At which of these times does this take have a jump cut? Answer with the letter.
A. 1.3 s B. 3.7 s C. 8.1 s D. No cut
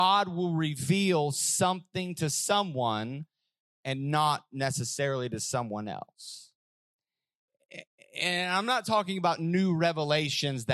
D